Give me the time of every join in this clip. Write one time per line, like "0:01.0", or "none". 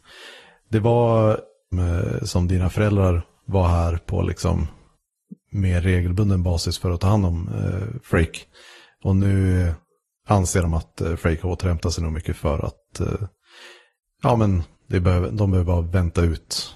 0:01.7